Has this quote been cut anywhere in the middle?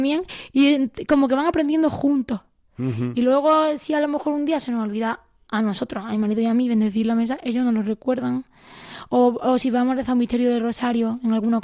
no; 0 cuts

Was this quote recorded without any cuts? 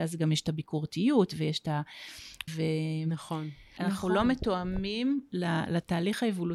no; 2 cuts; at 2.5 s, 3.8 s

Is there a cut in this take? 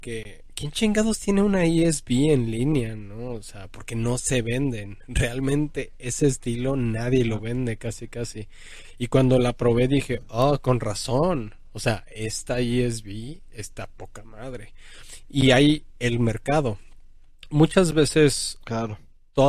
no; 0 cuts

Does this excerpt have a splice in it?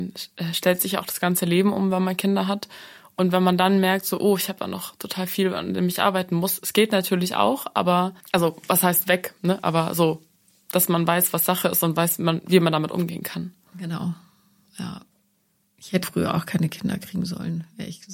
yes; 2 cuts; at 8.2 s, 16.0 s

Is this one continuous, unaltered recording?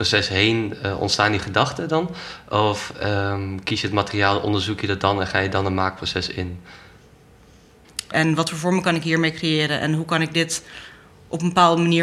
no; 1 cut; at 8.1 s

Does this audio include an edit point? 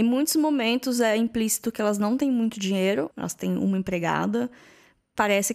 yes; 1 cut; at 3.1 s

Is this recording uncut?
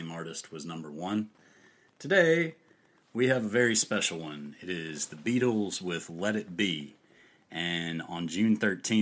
yes; 0 cuts

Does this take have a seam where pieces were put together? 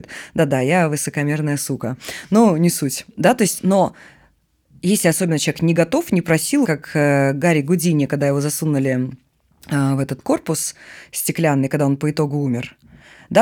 yes; 1 cut; at 6.6 s

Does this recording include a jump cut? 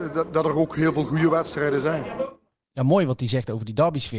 no; 0 cuts

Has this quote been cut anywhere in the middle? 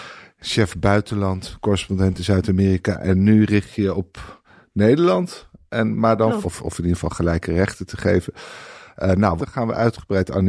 yes; 2 cuts; at 6.4 s, 9.4 s

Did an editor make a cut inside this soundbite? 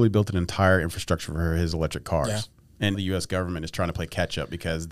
yes; 1 cut; at 2.9 s

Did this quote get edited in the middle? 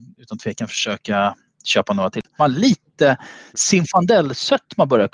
yes; 1 cut; at 2.4 s

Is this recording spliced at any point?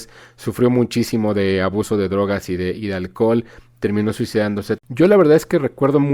yes; 1 cut; at 4.8 s

